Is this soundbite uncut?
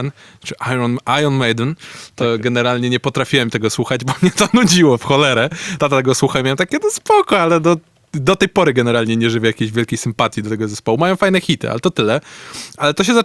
yes; 0 cuts

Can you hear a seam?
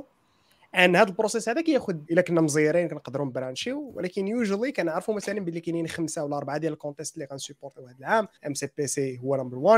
yes; 2 cuts; at 2.1 s, 8.4 s

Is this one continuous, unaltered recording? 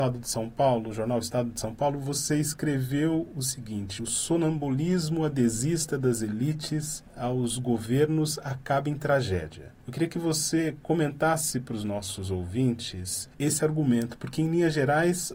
yes; 0 cuts

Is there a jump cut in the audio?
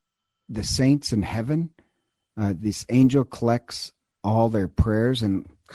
no; 0 cuts

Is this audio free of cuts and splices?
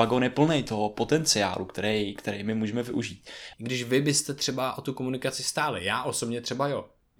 no; 1 cut; at 3.5 s

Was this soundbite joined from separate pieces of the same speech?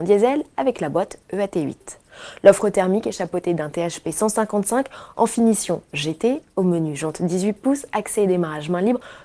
no; 0 cuts

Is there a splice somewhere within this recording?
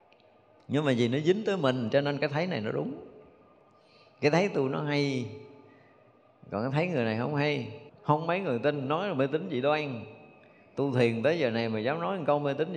yes; 1 cut; at 7.9 s

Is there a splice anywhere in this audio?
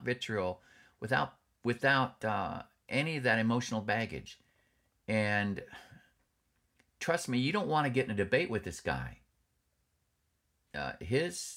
no; 0 cuts

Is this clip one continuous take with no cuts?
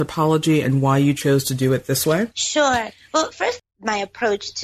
no; 2 cuts; at 2.3 s, 3.6 s

